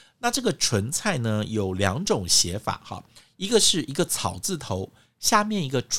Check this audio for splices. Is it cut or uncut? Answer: uncut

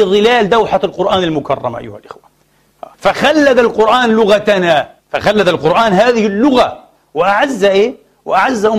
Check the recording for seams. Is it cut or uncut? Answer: cut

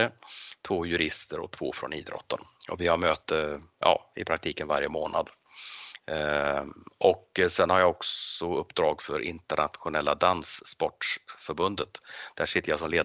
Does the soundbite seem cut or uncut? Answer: uncut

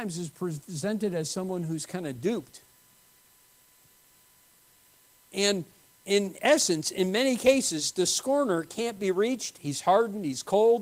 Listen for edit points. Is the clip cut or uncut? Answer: uncut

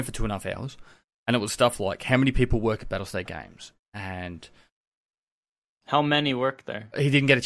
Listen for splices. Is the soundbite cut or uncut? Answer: uncut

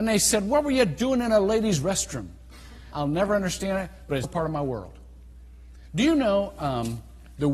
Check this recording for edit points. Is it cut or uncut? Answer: cut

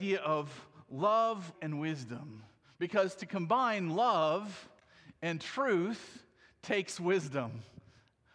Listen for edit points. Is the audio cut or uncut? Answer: cut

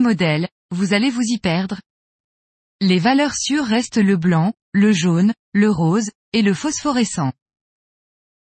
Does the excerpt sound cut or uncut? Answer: uncut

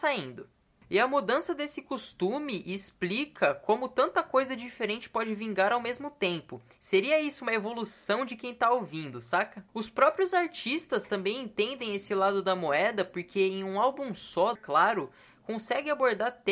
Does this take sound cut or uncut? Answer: cut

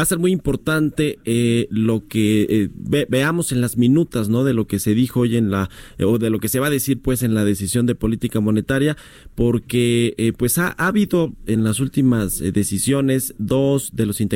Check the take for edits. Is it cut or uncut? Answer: uncut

